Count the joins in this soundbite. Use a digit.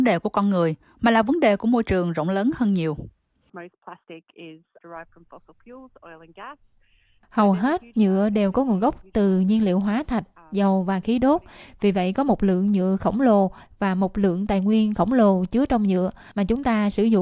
1